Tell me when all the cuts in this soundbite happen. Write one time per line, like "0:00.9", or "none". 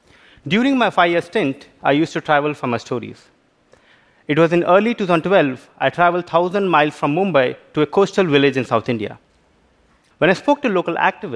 0:10.1